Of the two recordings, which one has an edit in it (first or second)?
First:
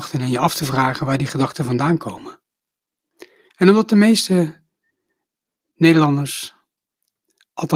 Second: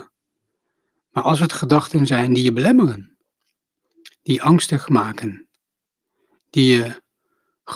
first